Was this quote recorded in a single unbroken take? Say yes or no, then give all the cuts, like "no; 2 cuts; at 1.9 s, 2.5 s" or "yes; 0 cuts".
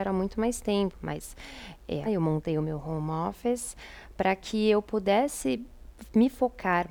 no; 2 cuts; at 0.9 s, 2.0 s